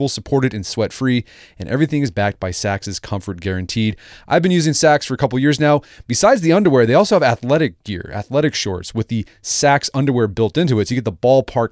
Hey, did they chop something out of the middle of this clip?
no; 0 cuts

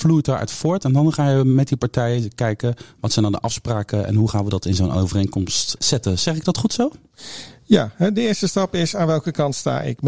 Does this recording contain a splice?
yes; 1 cut; at 5.8 s

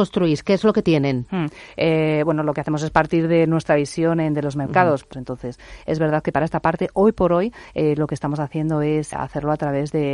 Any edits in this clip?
yes; 2 cuts; at 5.1 s, 9.1 s

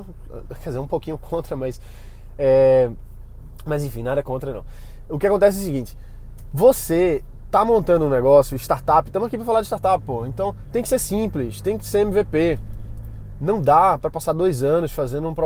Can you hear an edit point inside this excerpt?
no; 0 cuts

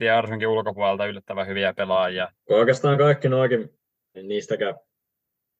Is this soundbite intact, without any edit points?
no; 2 cuts; at 2.5 s, 4.1 s

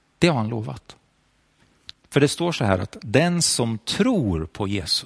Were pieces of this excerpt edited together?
yes; 1 cut; at 1.9 s

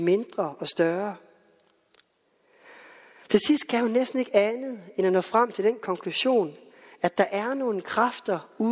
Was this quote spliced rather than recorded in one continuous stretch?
no; 0 cuts

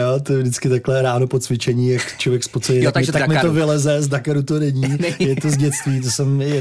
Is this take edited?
yes; 1 cut; at 3.1 s

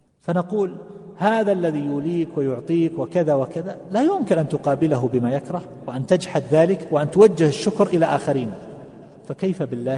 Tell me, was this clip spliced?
no; 0 cuts

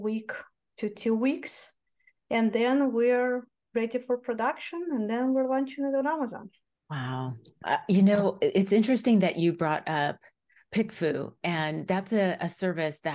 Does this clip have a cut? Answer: no; 0 cuts

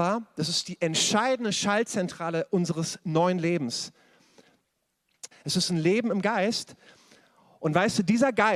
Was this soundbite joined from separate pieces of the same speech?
yes; 1 cut; at 5.3 s

